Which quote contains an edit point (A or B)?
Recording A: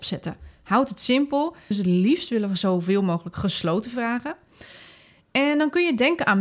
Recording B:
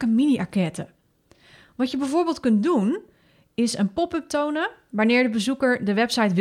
A